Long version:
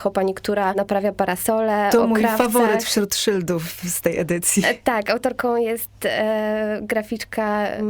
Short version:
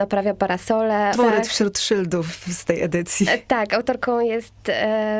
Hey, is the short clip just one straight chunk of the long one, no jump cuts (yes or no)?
no